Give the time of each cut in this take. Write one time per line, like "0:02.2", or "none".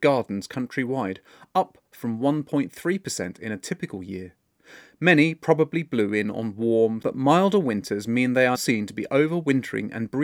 0:07.0
0:08.5